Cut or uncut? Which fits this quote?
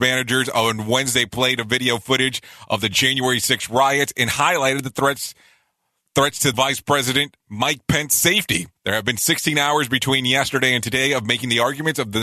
cut